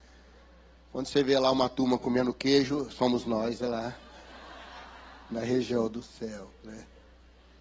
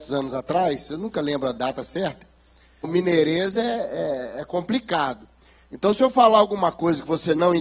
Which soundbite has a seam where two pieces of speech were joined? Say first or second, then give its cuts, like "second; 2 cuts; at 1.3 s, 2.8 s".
second; 1 cut; at 2.8 s